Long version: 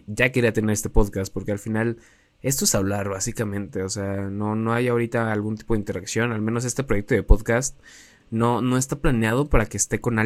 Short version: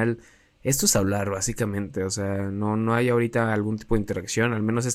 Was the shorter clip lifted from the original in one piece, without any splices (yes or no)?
yes